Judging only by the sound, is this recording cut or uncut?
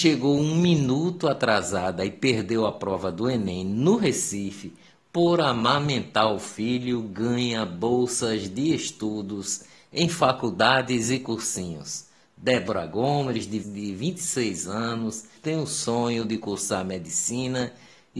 cut